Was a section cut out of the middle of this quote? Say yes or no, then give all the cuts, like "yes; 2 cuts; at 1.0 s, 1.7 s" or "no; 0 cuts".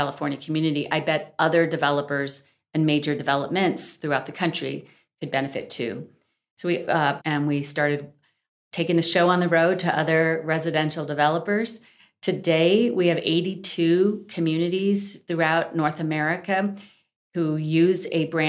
yes; 1 cut; at 7.2 s